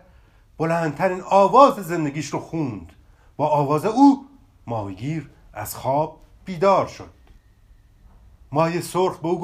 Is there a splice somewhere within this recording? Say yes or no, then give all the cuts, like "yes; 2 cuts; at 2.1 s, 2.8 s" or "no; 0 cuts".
no; 0 cuts